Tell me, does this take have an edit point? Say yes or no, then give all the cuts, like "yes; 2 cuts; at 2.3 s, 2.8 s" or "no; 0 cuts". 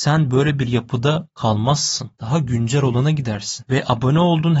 no; 0 cuts